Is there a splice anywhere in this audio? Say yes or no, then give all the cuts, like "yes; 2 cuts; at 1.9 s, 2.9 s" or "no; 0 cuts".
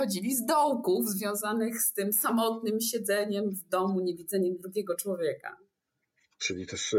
no; 0 cuts